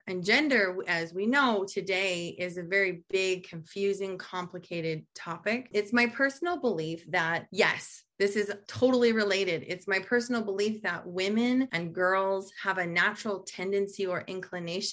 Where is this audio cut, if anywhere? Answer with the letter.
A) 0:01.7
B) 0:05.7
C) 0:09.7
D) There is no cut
D